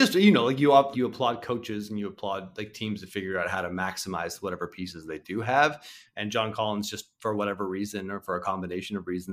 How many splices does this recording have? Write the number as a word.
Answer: one